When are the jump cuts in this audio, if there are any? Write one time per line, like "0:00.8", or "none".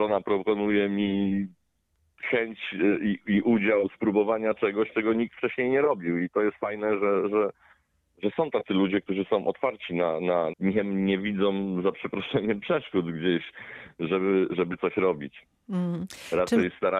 0:10.5